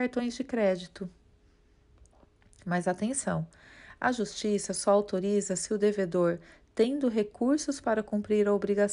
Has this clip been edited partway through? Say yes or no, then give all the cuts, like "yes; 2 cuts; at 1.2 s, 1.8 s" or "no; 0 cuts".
no; 0 cuts